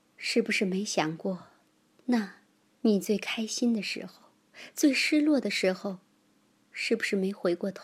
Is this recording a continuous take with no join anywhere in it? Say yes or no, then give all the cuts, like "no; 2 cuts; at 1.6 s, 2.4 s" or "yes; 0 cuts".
no; 1 cut; at 2.7 s